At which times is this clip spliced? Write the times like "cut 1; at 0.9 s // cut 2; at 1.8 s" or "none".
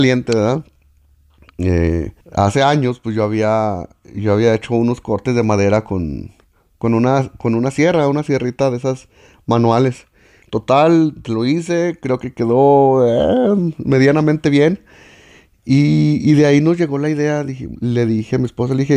cut 1; at 2.2 s // cut 2; at 10.4 s